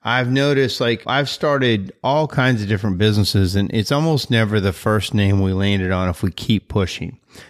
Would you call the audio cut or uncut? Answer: cut